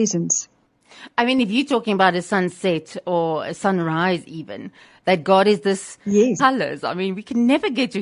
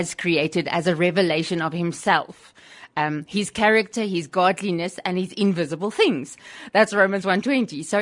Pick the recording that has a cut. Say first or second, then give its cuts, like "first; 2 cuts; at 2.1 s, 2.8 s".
first; 1 cut; at 6.4 s